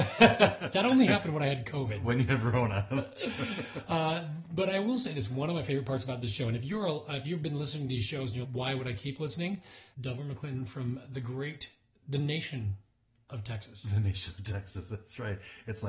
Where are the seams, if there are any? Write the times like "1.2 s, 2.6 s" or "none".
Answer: 8.4 s, 9.9 s